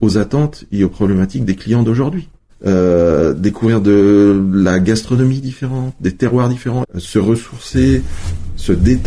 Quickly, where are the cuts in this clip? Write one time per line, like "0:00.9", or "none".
0:02.5
0:06.8